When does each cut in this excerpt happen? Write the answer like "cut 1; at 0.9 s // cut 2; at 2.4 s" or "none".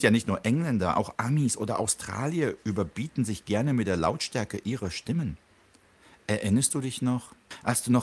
none